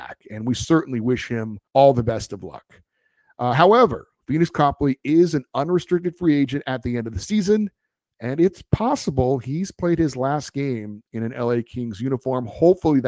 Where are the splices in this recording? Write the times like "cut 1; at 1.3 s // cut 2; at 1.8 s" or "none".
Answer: cut 1; at 1.7 s